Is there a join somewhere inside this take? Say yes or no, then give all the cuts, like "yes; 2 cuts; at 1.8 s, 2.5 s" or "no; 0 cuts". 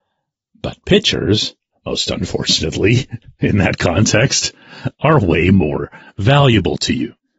no; 0 cuts